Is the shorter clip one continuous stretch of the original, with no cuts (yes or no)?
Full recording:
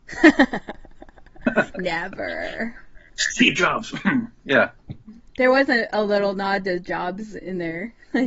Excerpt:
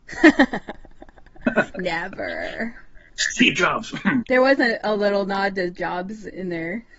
no